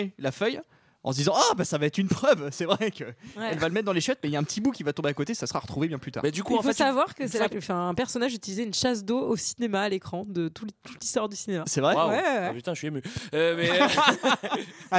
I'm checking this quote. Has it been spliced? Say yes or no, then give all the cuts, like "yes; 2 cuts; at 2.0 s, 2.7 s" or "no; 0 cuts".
yes; 1 cut; at 7.5 s